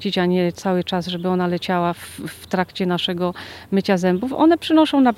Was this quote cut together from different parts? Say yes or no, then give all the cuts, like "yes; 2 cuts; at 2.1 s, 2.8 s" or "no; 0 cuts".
no; 0 cuts